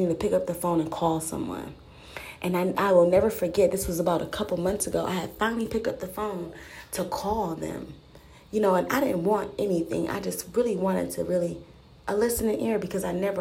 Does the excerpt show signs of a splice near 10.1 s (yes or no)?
no